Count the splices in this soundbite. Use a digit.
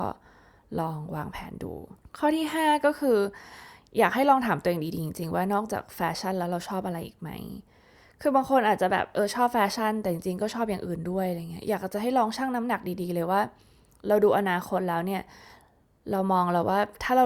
0